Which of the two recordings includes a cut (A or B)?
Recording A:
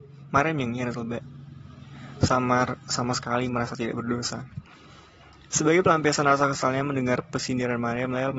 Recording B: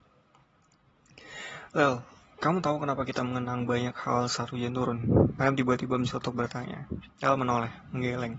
B